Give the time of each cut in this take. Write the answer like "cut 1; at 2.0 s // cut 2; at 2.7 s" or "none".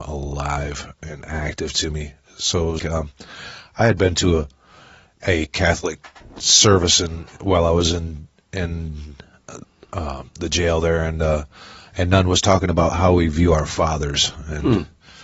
cut 1; at 2.8 s

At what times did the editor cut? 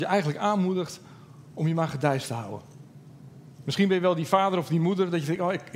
cut 1; at 3.6 s

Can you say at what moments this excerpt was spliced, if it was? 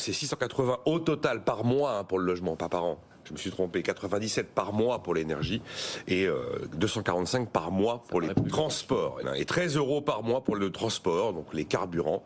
cut 1; at 9.2 s

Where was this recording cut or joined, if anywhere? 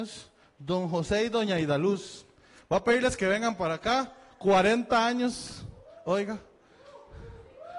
none

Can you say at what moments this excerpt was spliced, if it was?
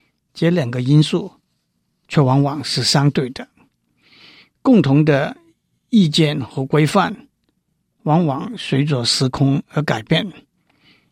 none

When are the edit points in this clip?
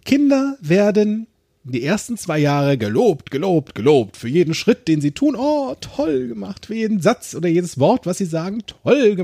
none

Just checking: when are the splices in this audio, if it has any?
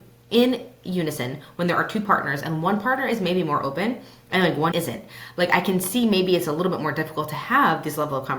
cut 1; at 4.7 s

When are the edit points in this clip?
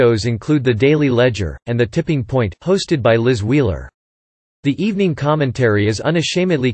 cut 1; at 1.6 s

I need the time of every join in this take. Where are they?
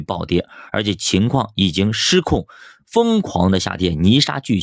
none

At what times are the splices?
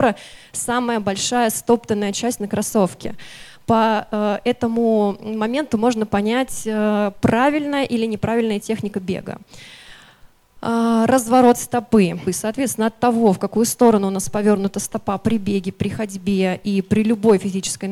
cut 1; at 12.3 s

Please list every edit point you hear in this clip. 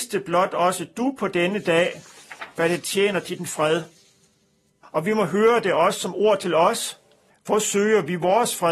cut 1; at 4.8 s // cut 2; at 7.3 s

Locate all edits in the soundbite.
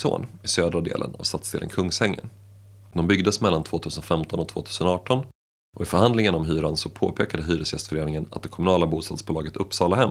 none

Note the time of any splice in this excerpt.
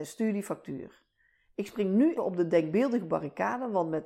cut 1; at 2.2 s

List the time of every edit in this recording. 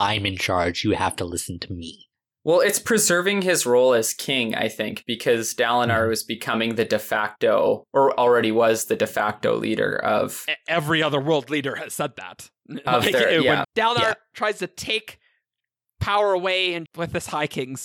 cut 1; at 13.6 s // cut 2; at 16.9 s

